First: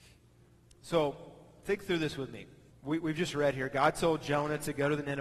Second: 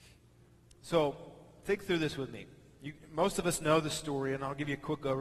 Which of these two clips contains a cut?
first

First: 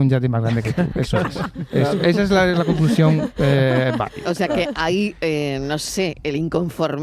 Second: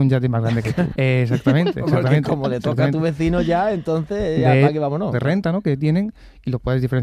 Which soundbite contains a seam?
second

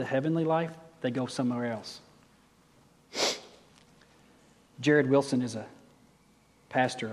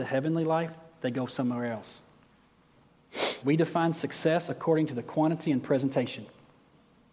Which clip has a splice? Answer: second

